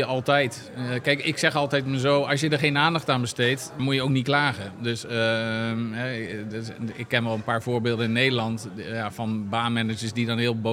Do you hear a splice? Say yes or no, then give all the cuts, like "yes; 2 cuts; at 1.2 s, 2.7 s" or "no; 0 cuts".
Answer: yes; 1 cut; at 3.8 s